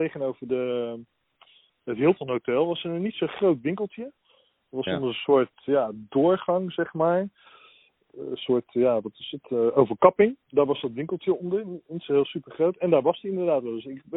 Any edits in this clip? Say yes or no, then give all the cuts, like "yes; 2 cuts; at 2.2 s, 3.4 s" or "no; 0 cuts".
no; 0 cuts